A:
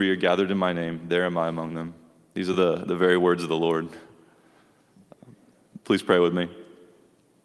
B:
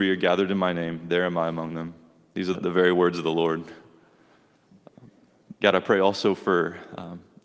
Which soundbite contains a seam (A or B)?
B